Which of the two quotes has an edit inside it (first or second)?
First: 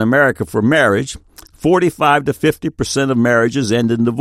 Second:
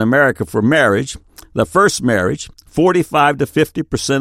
first